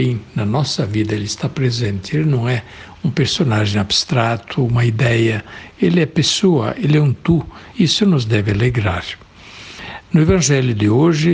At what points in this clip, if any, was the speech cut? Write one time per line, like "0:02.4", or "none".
0:07.7